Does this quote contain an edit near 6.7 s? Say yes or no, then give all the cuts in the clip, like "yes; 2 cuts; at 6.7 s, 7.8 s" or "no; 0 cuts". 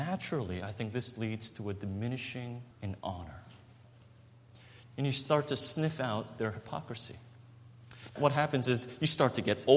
no; 3 cuts; at 2.7 s, 4.8 s, 8.2 s